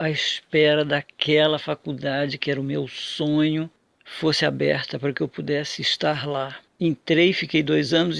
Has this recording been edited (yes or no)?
yes